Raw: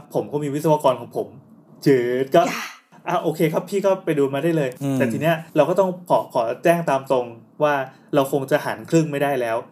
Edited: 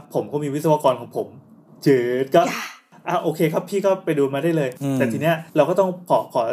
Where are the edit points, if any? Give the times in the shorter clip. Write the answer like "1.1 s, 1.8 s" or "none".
none